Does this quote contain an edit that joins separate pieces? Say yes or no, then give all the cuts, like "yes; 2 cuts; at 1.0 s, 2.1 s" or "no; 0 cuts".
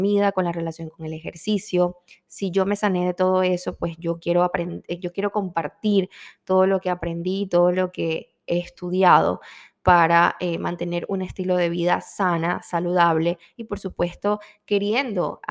no; 0 cuts